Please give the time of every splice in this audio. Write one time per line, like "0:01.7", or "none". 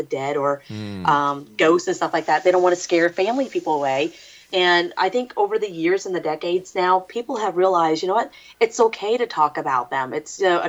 none